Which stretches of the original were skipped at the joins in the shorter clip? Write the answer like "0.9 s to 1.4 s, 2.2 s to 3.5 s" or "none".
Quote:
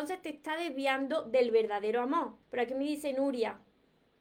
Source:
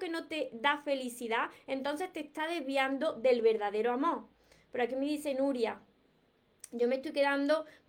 4.3 s to 4.6 s